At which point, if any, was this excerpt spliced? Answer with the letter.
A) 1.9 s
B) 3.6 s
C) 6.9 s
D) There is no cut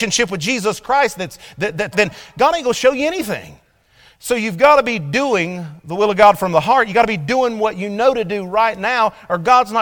A